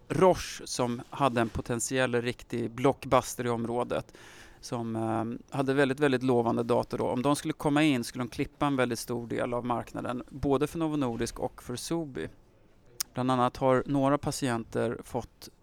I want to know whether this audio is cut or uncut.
cut